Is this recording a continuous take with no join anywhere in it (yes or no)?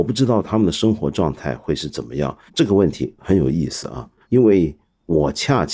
no